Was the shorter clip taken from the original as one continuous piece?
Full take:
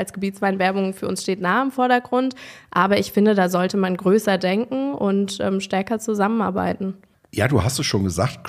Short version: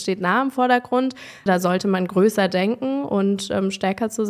no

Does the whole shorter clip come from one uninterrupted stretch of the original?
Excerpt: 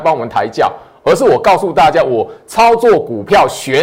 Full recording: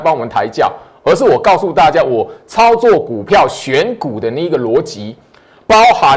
yes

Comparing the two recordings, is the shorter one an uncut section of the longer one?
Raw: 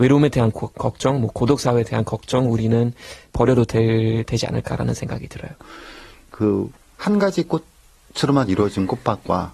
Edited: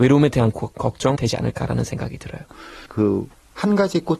no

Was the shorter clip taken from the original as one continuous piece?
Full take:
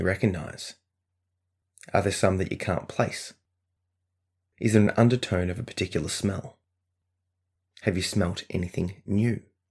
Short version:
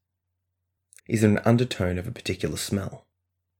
no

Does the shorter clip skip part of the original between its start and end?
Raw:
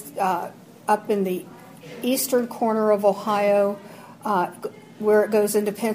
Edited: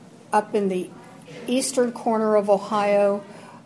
no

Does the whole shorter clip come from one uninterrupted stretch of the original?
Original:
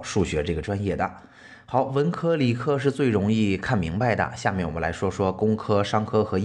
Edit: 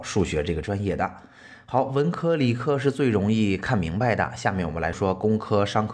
no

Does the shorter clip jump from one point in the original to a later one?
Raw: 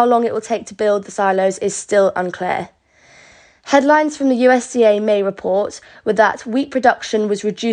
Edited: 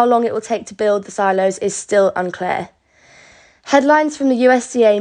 no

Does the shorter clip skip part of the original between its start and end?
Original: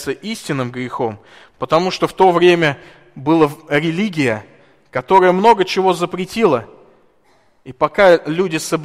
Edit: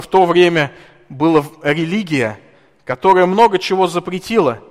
no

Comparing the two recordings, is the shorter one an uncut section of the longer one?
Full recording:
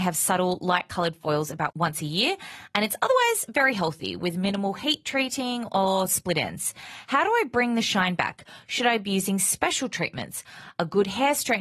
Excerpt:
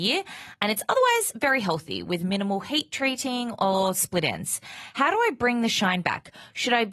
yes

